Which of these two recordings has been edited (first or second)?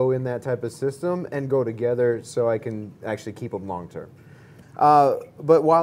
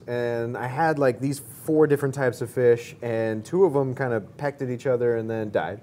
first